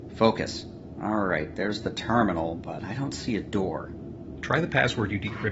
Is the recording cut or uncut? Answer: uncut